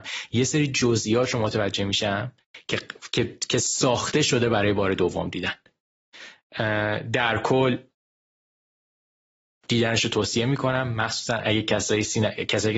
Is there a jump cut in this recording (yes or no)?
no